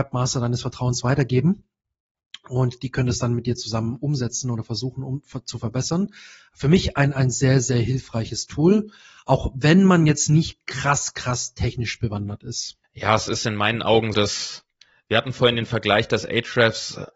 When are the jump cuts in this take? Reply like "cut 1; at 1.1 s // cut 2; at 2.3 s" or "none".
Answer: cut 1; at 12.8 s // cut 2; at 14.1 s